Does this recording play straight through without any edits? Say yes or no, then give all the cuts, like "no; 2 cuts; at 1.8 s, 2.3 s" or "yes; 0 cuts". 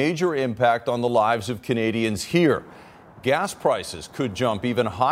yes; 0 cuts